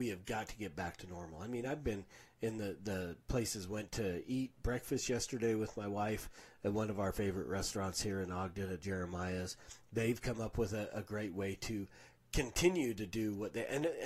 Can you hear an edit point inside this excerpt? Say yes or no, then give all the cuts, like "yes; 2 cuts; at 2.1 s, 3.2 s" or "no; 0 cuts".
no; 0 cuts